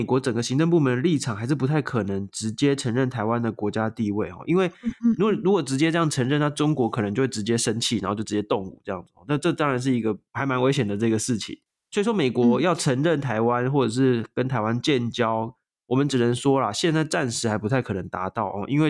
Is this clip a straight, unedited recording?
yes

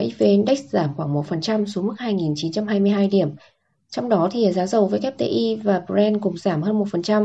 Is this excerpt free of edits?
yes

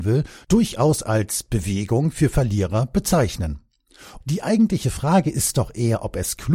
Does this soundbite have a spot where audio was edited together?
yes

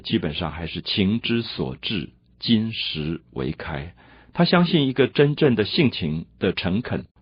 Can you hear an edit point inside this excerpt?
no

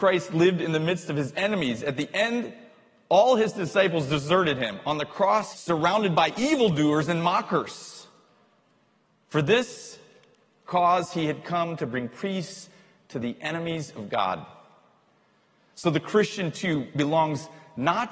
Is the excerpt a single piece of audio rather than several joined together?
no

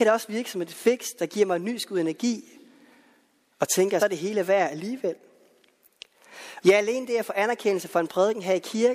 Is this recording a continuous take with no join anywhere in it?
no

